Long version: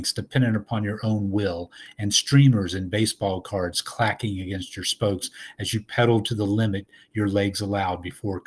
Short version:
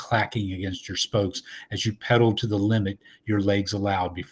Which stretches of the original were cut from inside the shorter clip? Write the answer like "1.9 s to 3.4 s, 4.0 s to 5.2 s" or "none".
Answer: none